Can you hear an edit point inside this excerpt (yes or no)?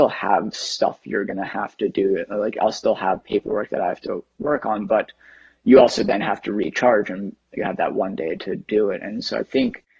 no